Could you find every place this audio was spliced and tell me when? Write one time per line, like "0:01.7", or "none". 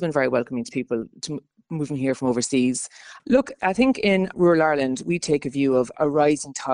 0:03.2
0:04.3